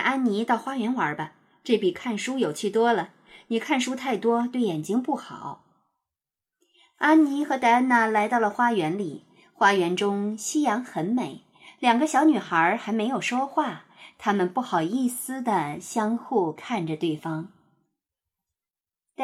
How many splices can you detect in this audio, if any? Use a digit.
0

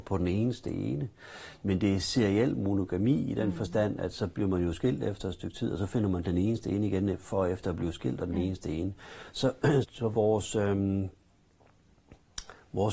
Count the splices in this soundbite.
1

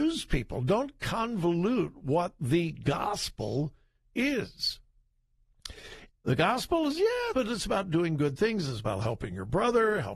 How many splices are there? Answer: 2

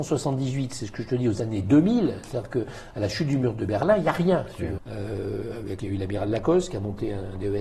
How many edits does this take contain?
2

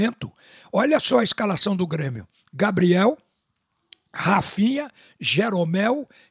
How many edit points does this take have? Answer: 0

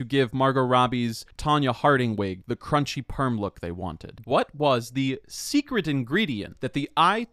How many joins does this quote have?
1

